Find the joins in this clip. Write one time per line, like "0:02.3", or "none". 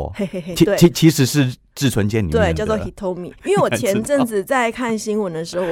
none